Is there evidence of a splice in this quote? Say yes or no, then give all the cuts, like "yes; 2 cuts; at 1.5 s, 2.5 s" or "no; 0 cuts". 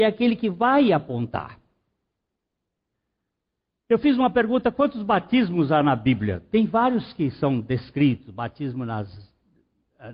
no; 0 cuts